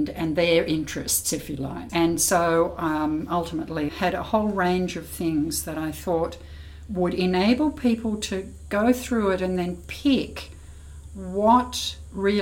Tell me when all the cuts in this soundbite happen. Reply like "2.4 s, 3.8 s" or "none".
1.9 s, 3.9 s

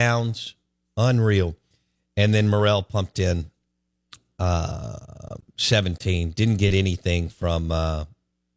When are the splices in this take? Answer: none

